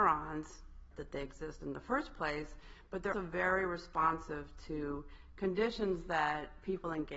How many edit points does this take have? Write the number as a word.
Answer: two